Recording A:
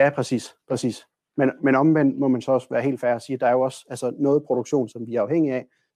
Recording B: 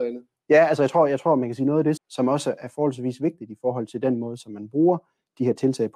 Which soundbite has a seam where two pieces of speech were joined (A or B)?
B